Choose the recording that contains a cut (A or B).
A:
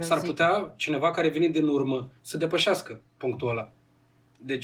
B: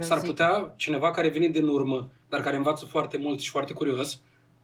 A